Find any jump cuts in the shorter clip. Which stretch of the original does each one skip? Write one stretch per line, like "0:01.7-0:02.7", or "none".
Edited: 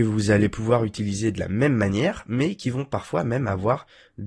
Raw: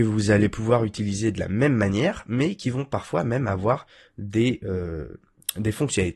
none